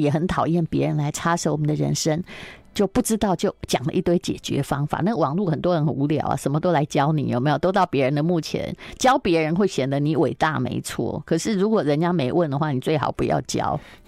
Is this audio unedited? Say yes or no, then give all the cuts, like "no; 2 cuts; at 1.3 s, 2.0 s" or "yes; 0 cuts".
yes; 0 cuts